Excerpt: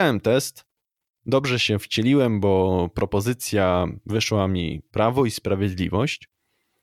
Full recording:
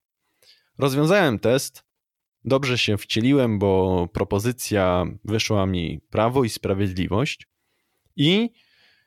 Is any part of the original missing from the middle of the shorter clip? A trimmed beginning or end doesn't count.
no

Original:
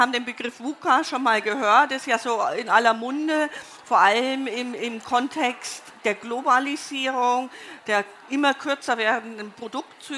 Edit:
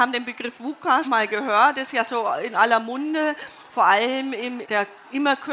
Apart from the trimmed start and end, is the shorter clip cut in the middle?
yes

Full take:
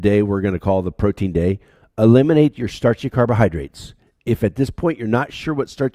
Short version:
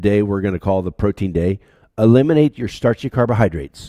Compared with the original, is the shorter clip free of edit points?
yes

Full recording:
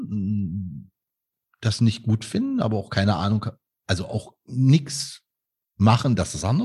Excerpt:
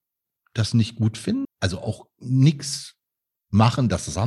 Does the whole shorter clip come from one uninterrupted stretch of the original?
no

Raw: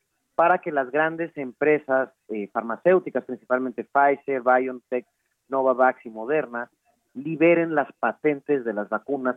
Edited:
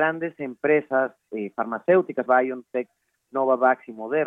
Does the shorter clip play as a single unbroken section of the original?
no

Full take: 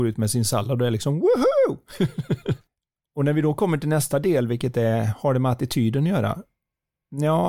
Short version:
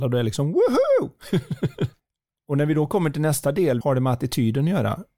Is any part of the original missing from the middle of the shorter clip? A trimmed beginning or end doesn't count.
yes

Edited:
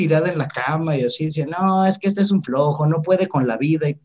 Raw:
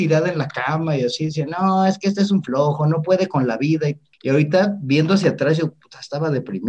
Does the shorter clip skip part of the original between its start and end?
no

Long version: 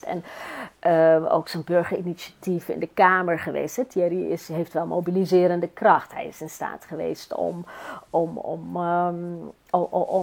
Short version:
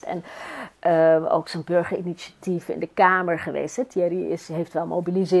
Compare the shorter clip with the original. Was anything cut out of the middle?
no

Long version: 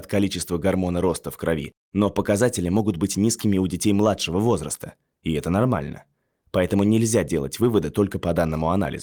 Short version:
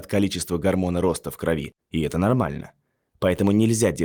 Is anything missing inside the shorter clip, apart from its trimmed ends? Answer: yes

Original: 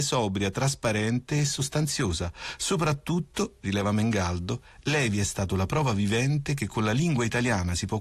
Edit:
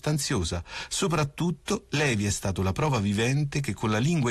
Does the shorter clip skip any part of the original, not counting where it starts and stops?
yes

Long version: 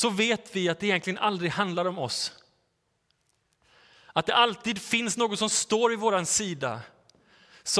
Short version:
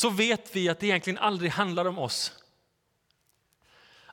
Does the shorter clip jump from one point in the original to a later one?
no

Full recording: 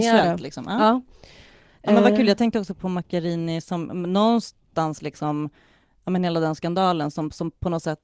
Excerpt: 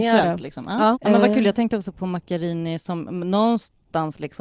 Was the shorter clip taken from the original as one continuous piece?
no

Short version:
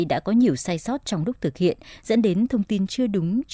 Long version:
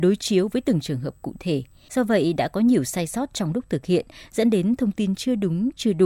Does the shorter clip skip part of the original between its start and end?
no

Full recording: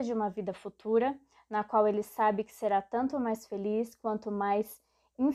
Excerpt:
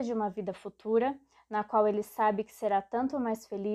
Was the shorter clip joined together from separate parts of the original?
no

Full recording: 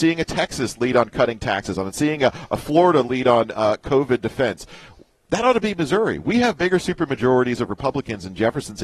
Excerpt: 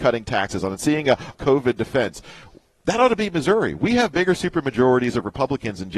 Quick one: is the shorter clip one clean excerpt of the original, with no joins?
no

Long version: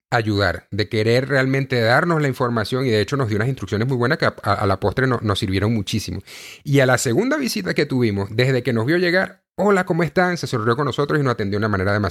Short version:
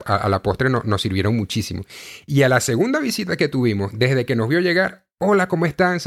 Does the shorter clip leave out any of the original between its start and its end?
no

